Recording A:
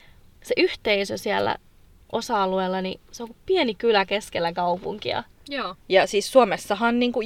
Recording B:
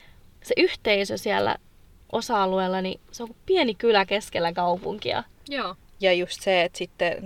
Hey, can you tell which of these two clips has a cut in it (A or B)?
A